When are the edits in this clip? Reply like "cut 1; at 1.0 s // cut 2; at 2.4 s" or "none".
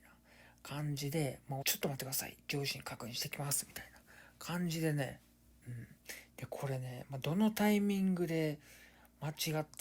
cut 1; at 1.6 s // cut 2; at 6.3 s